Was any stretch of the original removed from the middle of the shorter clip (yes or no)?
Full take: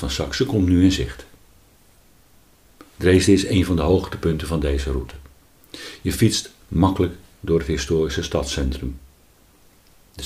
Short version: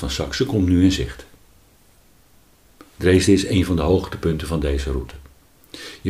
no